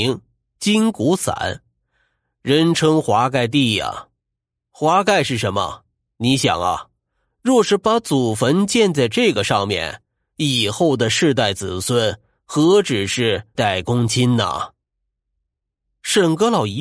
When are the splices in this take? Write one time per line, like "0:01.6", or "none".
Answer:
0:06.1
0:13.6